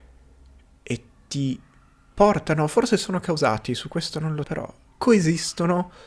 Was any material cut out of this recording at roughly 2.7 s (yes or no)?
no